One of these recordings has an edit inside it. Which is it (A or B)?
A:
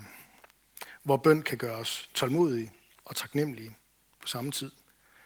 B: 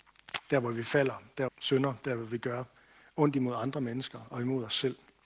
B